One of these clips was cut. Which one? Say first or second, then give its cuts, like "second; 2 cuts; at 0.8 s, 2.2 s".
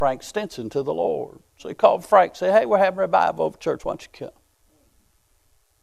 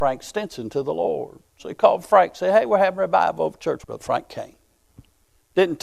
second; 1 cut; at 3.8 s